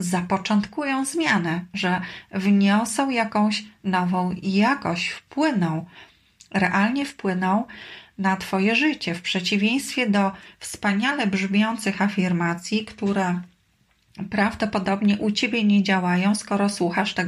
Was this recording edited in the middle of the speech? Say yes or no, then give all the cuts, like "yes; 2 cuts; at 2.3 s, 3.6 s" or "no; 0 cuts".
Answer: no; 0 cuts